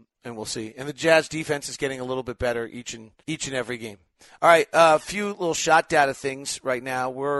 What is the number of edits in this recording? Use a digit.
1